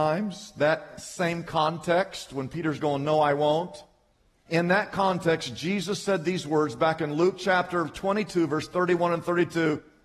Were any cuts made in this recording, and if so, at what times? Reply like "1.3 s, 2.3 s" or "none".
none